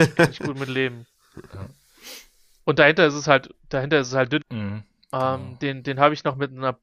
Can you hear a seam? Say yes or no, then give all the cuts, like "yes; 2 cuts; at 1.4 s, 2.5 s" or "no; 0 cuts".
yes; 1 cut; at 4.4 s